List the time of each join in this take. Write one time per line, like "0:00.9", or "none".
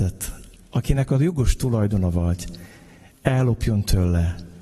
none